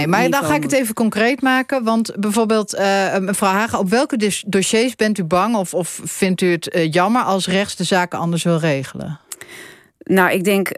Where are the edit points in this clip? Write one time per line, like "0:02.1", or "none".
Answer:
none